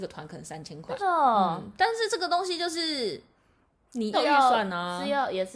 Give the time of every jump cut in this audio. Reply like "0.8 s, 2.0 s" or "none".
1.0 s, 4.1 s